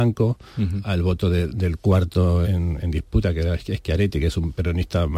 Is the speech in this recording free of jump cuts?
no; 1 cut; at 2.4 s

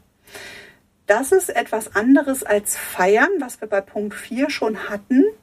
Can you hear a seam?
no; 0 cuts

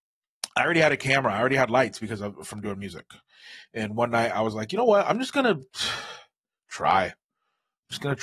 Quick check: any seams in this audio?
no; 0 cuts

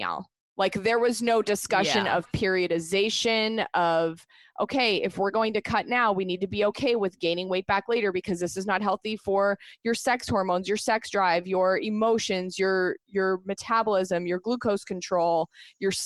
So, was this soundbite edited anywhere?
no; 0 cuts

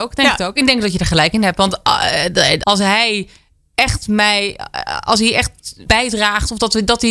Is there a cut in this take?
yes; 2 cuts; at 2.6 s, 5.9 s

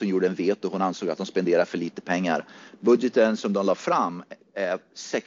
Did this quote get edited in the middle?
no; 0 cuts

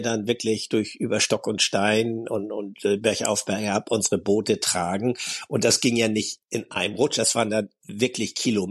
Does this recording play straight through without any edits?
yes; 0 cuts

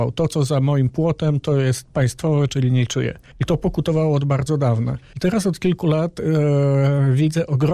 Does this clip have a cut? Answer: no; 0 cuts

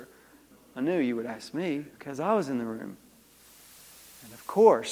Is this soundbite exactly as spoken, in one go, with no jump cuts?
no; 1 cut; at 1.9 s

